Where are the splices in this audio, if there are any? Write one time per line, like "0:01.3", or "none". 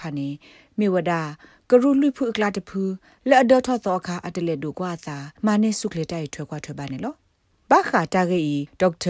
0:05.4